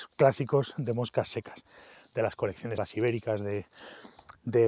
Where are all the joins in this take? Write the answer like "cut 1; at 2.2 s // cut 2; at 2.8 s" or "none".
cut 1; at 2.8 s